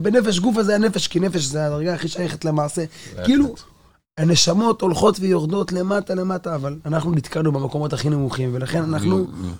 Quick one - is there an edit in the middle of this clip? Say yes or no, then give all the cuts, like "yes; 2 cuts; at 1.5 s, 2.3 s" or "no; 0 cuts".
no; 0 cuts